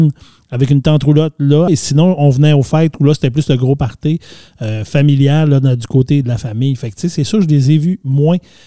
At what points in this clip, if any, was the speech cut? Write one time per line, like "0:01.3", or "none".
0:01.7
0:06.2